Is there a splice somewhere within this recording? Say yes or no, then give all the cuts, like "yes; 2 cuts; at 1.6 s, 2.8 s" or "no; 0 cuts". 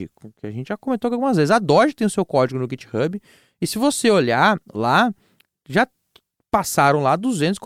no; 0 cuts